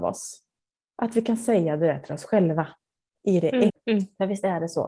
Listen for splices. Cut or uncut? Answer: cut